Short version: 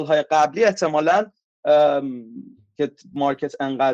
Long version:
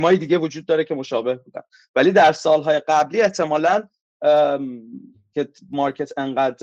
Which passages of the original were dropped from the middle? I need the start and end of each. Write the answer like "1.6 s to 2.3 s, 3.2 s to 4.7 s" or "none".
none